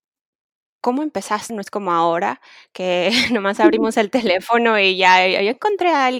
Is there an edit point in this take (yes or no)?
yes